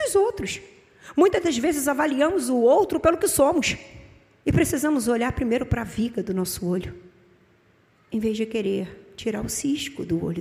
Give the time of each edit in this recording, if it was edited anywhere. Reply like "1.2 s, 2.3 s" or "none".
4.4 s